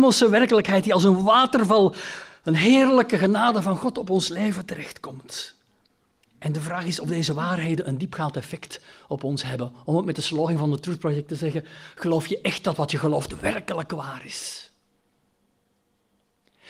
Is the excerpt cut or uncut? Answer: uncut